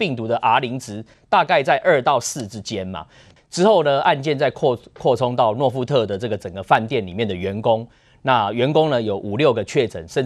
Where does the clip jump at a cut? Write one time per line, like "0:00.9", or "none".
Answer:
0:03.4